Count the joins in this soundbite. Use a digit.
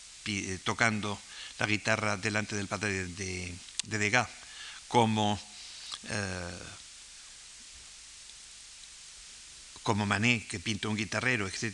1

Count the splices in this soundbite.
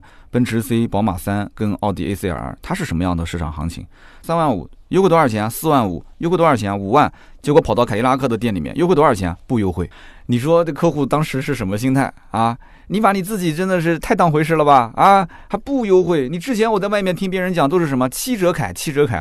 1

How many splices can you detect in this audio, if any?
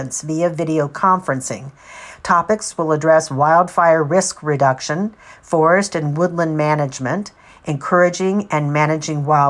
0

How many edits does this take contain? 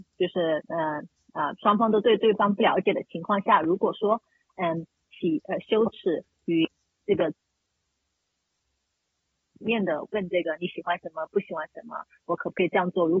0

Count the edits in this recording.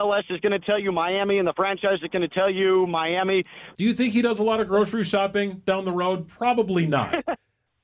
1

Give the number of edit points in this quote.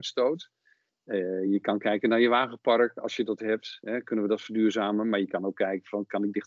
0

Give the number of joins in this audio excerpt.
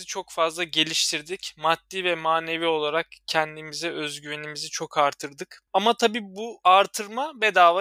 0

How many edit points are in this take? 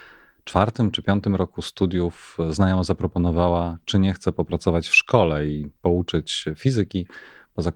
0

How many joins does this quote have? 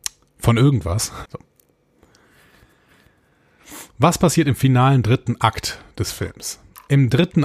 1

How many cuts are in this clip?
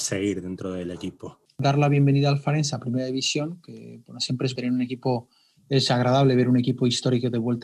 2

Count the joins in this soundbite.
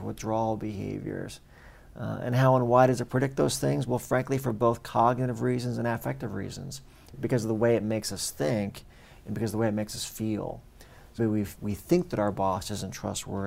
2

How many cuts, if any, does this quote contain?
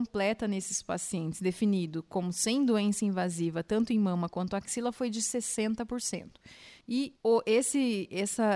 1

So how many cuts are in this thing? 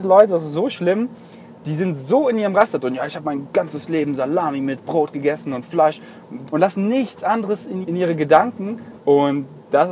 3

